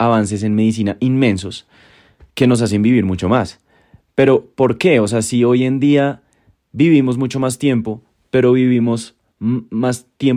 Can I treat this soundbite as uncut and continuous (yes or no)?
yes